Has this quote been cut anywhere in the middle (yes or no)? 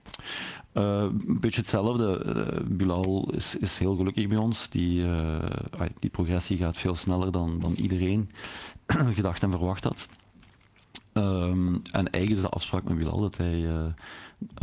no